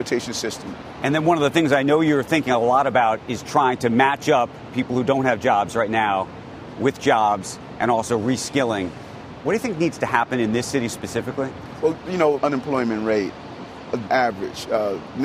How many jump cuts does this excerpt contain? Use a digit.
2